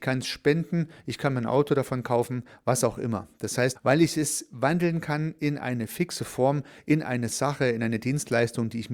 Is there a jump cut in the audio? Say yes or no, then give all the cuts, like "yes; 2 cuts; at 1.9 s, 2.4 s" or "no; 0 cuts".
yes; 1 cut; at 3.8 s